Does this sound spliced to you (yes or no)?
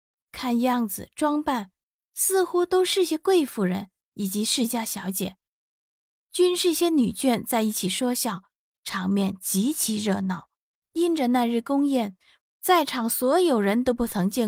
yes